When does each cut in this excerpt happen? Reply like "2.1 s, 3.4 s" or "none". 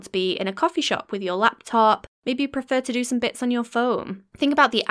2.1 s

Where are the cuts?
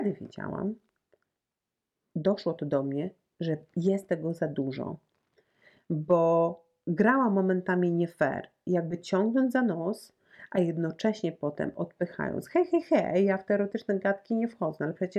none

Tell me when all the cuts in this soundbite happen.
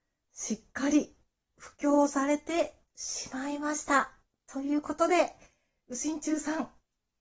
none

